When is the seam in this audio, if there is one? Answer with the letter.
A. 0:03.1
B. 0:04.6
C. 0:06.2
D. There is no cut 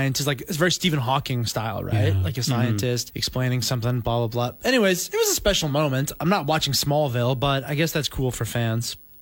A